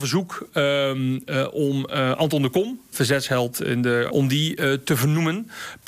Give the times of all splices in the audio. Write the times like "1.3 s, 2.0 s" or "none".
2.9 s, 4.1 s